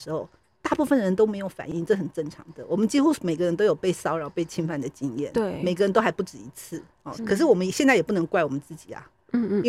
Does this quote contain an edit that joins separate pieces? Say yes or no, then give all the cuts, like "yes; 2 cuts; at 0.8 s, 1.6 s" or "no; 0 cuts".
yes; 1 cut; at 7.2 s